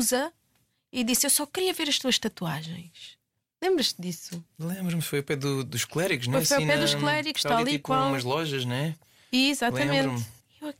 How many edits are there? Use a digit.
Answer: 0